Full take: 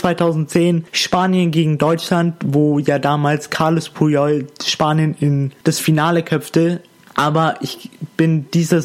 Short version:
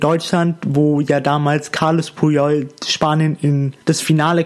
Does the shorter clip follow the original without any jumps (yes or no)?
yes